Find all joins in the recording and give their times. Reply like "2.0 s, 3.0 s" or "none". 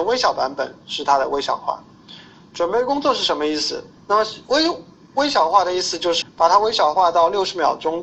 4.0 s, 6.2 s